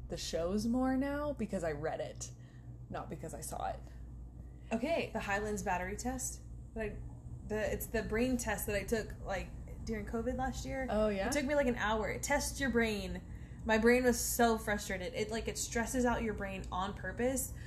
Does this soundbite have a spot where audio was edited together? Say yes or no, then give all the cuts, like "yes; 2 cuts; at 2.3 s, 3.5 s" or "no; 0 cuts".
yes; 1 cut; at 5.1 s